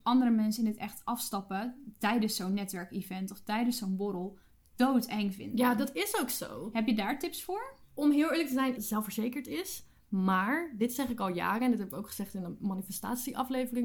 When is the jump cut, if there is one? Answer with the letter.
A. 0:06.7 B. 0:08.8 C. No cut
B